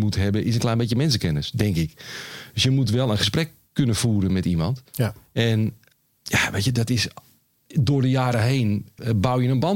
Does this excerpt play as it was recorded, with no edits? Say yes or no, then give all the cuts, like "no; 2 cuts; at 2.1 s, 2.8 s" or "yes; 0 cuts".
yes; 0 cuts